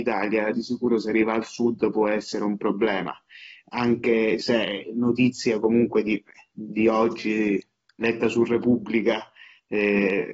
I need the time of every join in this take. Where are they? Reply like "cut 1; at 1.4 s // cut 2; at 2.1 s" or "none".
none